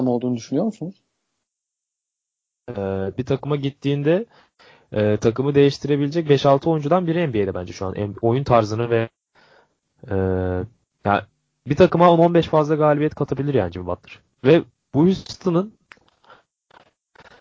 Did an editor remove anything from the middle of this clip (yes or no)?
yes